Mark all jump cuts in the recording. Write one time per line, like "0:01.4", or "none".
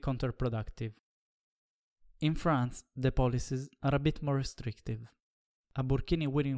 none